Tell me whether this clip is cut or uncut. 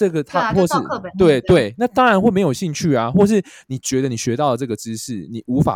uncut